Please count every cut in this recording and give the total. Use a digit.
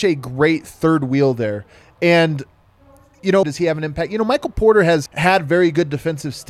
2